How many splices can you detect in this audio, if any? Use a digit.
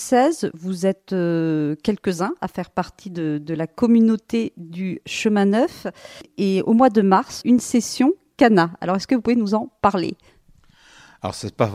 1